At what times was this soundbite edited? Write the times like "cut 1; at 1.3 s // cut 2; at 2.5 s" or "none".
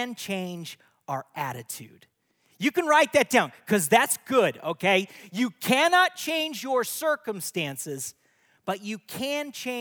none